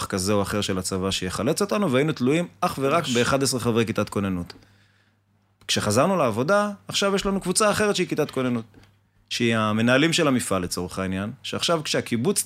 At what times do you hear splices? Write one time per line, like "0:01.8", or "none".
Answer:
none